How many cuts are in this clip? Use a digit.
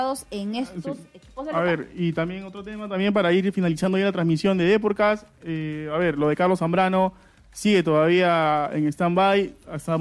0